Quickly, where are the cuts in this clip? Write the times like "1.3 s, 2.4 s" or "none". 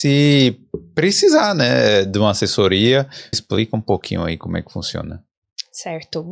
3.3 s